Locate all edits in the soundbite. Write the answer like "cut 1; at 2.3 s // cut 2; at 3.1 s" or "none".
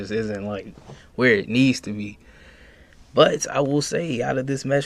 none